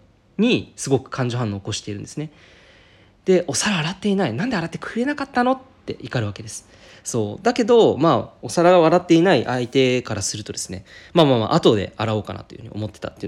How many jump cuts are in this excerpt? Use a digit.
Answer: 0